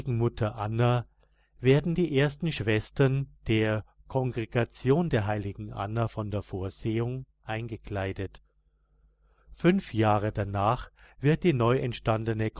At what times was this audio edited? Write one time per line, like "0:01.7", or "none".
none